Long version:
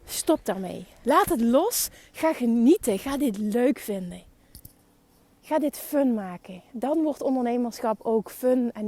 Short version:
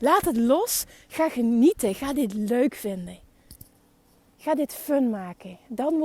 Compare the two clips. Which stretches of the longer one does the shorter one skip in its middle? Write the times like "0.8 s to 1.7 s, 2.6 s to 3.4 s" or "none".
none